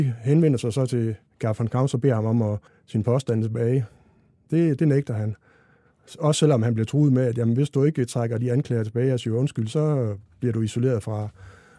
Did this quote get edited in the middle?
yes; 1 cut; at 2.7 s

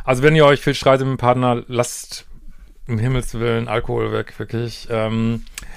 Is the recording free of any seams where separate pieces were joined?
yes; 0 cuts

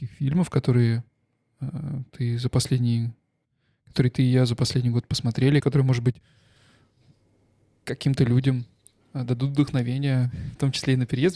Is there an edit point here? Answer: yes; 1 cut; at 5.6 s

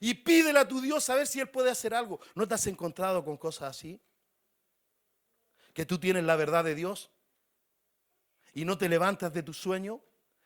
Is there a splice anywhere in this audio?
no; 0 cuts

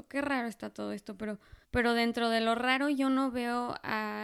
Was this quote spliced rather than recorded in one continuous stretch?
yes; 1 cut; at 1.6 s

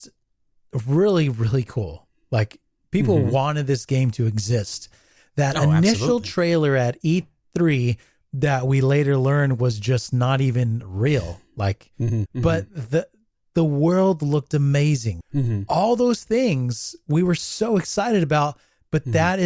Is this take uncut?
no; 2 cuts; at 12.3 s, 15.2 s

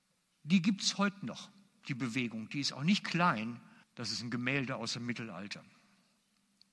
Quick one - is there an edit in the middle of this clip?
yes; 1 cut; at 3.8 s

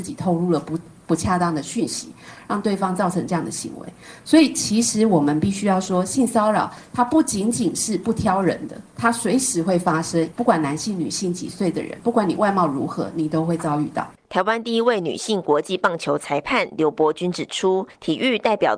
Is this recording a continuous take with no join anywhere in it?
yes; 0 cuts

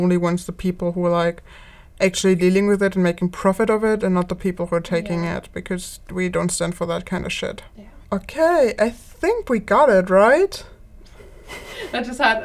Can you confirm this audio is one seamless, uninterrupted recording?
no; 2 cuts; at 8.0 s, 11.1 s

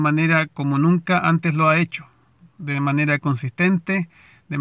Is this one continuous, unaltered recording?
yes; 0 cuts

